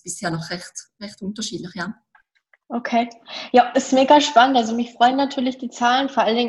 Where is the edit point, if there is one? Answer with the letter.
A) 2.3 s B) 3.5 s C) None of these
C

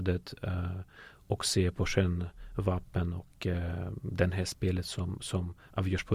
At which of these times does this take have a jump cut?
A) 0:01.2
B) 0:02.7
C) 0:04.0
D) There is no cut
D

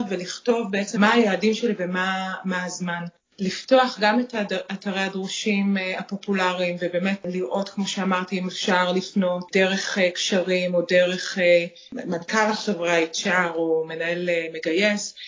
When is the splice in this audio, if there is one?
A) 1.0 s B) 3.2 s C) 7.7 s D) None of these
A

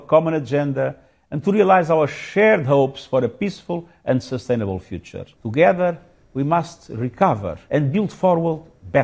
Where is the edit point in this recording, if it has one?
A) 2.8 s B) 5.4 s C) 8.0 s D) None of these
B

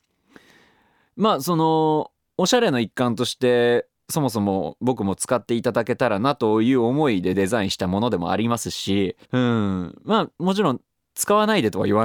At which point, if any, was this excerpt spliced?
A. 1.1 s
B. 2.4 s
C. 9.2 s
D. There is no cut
C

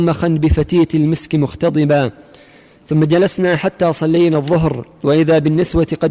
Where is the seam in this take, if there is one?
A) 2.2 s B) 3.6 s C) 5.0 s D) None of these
D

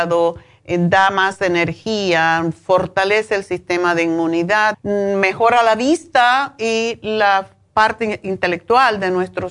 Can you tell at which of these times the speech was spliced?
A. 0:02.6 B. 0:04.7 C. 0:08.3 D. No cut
B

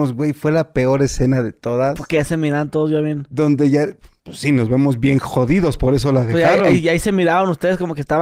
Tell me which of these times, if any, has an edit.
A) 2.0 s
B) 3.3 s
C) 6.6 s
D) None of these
D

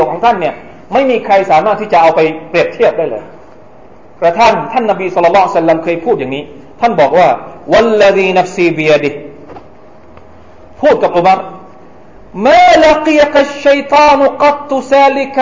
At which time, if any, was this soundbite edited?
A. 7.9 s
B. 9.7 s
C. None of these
C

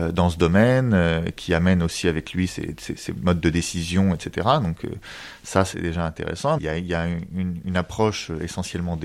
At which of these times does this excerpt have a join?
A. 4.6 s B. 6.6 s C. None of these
B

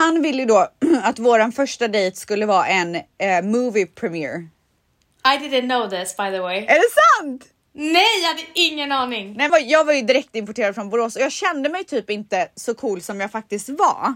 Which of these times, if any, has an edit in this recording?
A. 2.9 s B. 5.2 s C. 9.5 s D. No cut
C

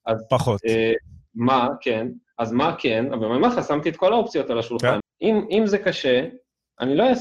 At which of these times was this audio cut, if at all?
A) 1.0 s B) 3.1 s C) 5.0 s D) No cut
C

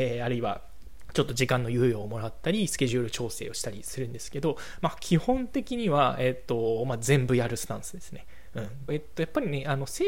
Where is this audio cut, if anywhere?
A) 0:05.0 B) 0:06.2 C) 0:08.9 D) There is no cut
C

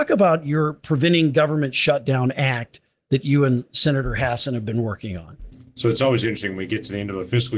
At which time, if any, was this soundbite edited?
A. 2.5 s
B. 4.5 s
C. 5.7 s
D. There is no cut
D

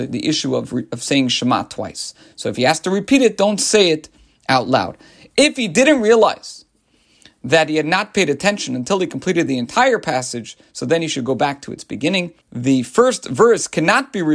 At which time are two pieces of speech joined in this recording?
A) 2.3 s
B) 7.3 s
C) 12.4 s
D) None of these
C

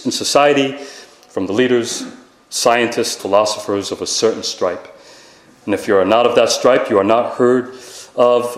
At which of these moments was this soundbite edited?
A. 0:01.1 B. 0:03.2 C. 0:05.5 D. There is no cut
B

